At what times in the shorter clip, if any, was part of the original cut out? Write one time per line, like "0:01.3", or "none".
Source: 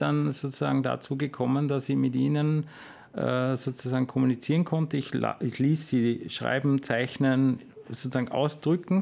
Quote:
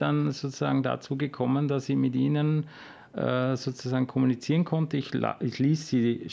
none